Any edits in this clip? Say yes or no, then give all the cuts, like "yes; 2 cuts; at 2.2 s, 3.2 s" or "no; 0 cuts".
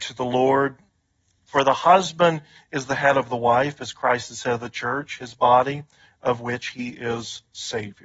no; 0 cuts